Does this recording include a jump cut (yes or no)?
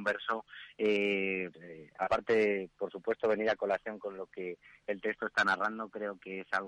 yes